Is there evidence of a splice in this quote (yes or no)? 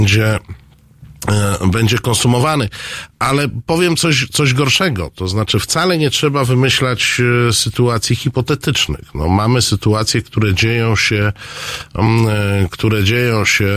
no